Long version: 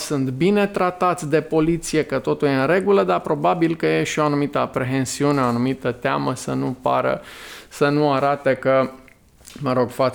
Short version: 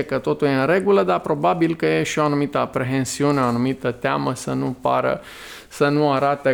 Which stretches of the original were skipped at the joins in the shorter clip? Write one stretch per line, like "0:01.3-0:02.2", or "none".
none